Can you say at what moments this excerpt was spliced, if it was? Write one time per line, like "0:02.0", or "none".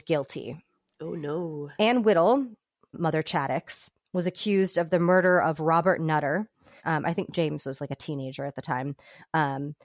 0:02.9
0:06.8